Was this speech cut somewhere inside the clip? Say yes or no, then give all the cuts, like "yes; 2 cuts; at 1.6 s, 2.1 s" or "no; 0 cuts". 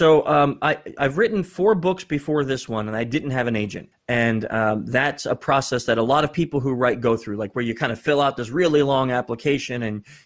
yes; 1 cut; at 3.9 s